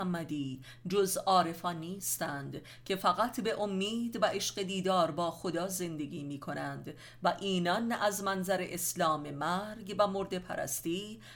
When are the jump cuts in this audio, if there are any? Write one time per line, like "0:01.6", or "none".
none